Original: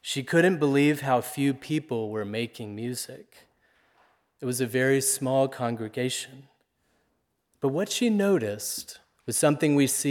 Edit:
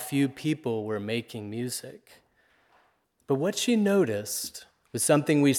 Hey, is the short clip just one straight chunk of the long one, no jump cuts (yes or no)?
no